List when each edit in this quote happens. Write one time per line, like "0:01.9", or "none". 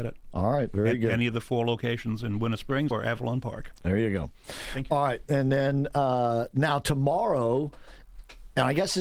0:02.9

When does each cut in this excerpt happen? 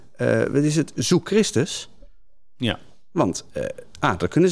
none

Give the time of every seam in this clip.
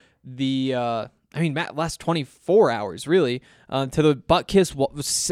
none

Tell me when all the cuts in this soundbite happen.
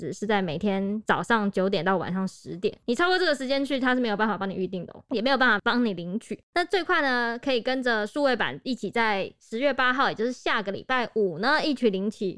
none

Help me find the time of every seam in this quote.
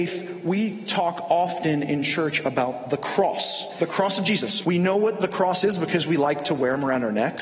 0:04.6

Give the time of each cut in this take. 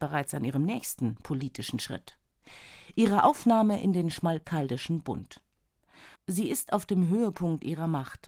0:06.2

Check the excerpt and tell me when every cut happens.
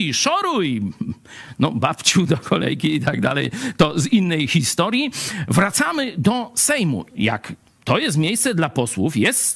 0:07.1

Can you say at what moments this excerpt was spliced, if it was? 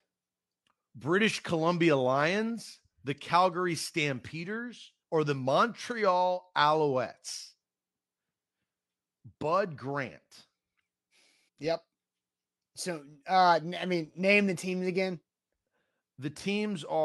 0:05.0
0:11.5

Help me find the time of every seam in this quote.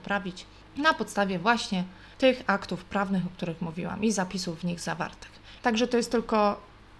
0:05.6

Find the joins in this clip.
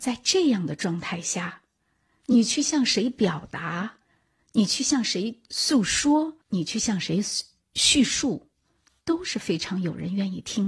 0:06.4

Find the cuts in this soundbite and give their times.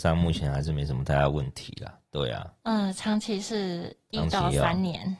none

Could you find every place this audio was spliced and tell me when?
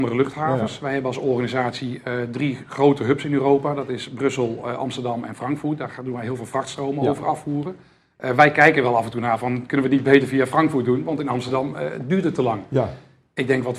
none

